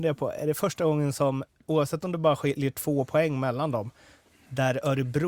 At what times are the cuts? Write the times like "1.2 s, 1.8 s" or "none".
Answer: none